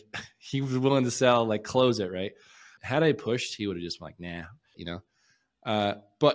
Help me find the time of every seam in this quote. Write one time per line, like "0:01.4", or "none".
0:02.8
0:04.7